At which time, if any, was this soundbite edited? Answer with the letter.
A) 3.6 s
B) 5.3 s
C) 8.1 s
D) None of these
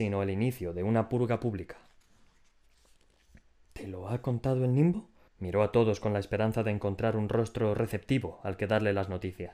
B